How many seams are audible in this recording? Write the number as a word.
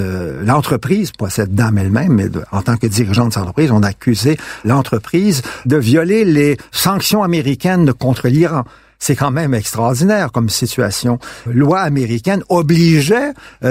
one